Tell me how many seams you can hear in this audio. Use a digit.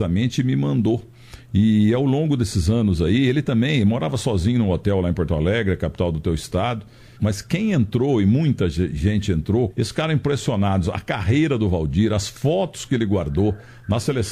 2